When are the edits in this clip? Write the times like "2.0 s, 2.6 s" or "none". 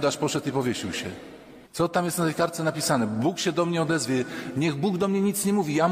1.7 s